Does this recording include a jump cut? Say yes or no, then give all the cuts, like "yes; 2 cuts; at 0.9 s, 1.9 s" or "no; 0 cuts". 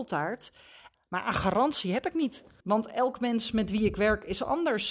yes; 2 cuts; at 0.9 s, 2.6 s